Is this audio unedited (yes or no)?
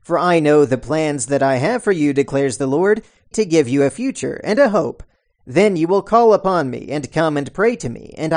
no